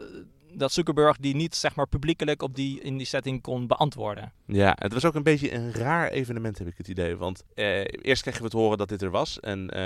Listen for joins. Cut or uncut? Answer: cut